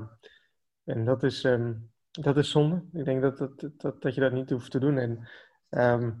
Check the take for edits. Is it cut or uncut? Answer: uncut